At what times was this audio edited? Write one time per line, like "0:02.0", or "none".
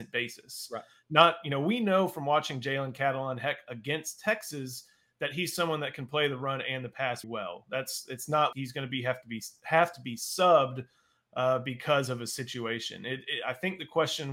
0:07.2
0:08.5